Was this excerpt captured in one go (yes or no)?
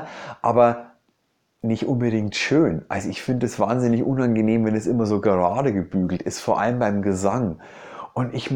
yes